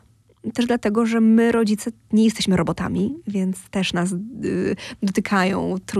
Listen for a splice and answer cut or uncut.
uncut